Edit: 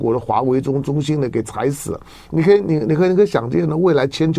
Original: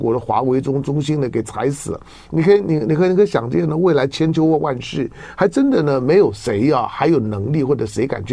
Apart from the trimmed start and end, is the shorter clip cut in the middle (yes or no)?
no